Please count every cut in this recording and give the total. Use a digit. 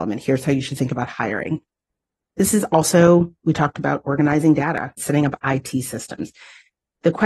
2